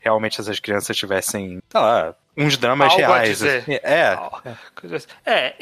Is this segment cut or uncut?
uncut